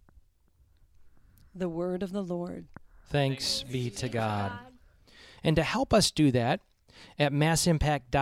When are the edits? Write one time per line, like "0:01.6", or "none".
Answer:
0:05.4